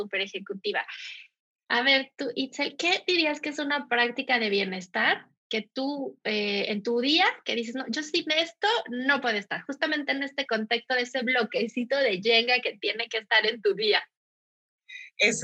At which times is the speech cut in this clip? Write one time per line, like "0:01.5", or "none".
none